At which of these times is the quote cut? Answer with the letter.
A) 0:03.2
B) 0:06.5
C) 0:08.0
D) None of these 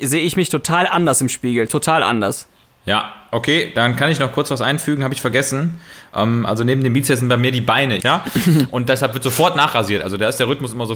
C